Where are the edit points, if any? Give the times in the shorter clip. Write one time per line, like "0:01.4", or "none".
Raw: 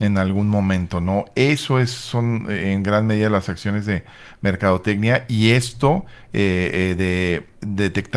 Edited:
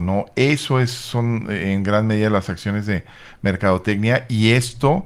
none